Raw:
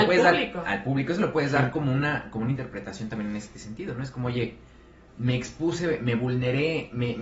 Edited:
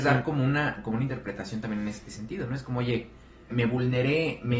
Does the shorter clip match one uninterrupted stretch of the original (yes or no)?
no